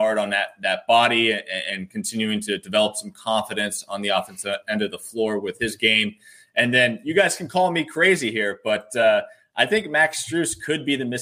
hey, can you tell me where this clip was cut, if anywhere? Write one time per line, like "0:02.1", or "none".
none